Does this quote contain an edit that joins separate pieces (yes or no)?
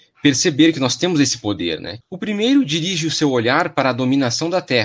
yes